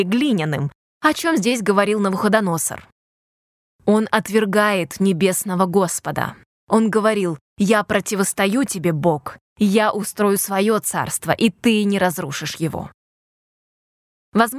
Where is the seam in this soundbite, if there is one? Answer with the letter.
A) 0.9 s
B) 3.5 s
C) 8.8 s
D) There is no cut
A